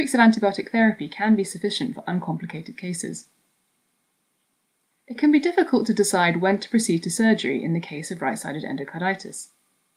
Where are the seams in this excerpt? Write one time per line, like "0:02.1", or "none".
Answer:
none